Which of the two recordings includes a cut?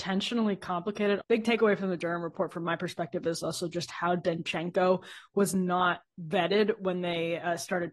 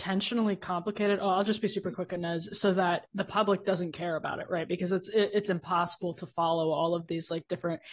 first; 1 cut; at 1.2 s

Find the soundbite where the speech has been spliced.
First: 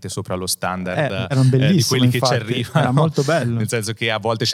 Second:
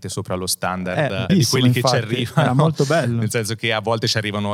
second; 1 cut; at 1.3 s

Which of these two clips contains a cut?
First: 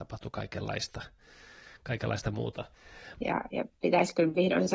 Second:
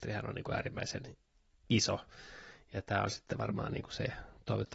first; 1 cut; at 3.2 s

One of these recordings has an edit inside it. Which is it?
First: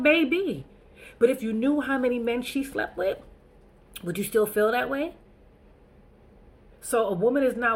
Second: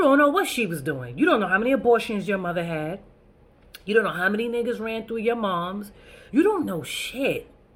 second; 1 cut; at 6.3 s

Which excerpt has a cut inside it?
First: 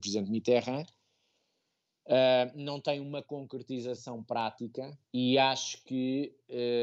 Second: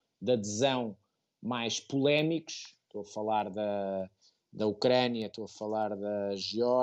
first; 1 cut; at 5.0 s

